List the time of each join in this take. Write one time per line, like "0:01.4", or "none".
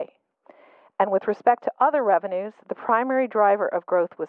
none